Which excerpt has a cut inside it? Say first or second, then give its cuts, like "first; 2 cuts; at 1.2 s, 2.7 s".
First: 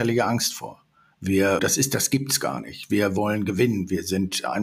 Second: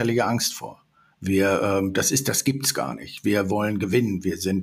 first; 1 cut; at 1.6 s